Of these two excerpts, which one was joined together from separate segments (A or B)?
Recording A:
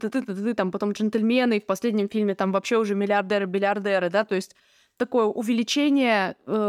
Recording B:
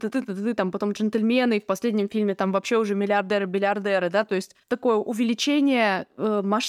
B